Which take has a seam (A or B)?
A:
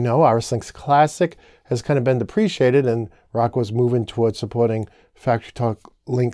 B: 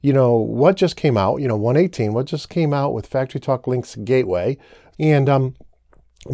B